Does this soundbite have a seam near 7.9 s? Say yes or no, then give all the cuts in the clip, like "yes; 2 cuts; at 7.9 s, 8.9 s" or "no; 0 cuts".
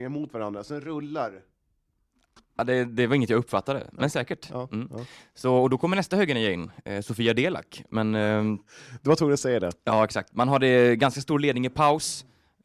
yes; 1 cut; at 7.9 s